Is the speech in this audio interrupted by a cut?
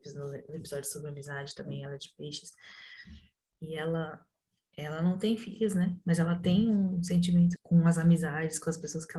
yes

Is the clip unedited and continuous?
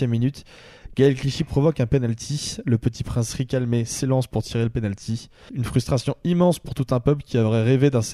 no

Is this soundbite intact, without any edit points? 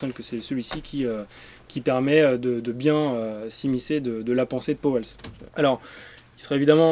no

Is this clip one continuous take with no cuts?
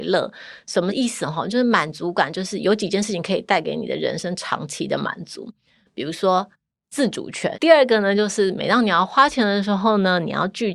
no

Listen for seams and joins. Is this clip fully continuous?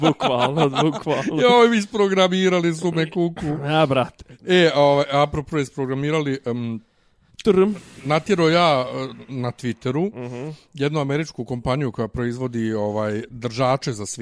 yes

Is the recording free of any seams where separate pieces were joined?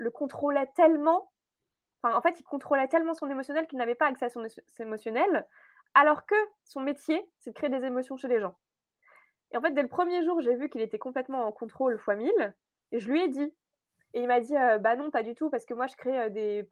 yes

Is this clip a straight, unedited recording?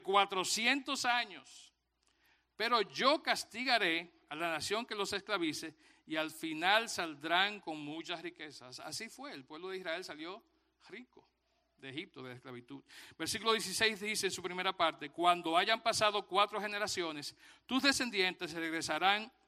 yes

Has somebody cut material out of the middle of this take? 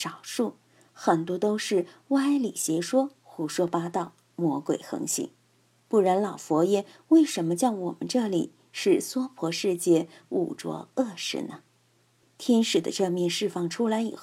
yes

